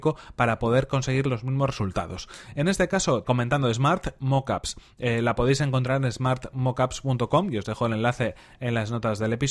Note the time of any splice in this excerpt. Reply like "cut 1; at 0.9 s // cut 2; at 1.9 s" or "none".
cut 1; at 3.2 s